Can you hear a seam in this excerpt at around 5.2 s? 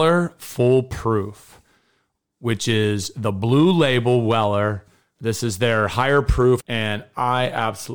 yes; 2 cuts; at 5.2 s, 6.6 s

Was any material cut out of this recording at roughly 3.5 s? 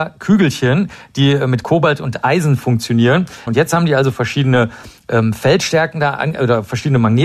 yes; 1 cut; at 3.5 s

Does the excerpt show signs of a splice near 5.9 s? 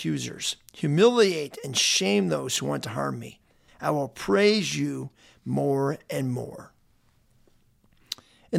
no; 1 cut; at 3.7 s

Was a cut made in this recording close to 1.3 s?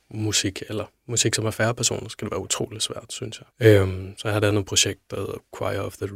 no; 1 cut; at 3.5 s

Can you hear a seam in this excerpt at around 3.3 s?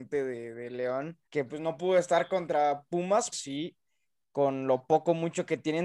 yes; 2 cuts; at 1.3 s, 3.3 s

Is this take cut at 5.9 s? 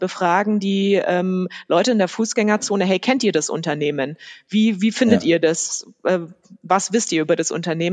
no; 0 cuts

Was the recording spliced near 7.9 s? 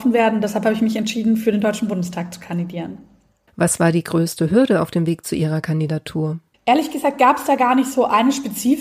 no; 0 cuts

